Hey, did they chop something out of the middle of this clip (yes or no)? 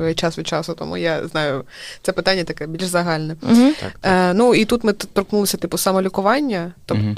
no